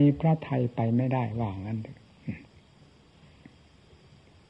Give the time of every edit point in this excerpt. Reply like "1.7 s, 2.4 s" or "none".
none